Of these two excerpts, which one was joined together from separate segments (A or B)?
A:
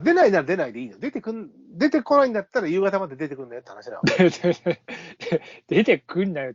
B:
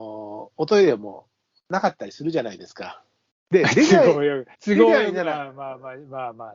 B